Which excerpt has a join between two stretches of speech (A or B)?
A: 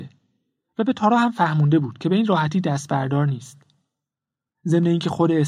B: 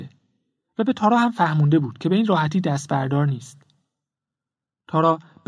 A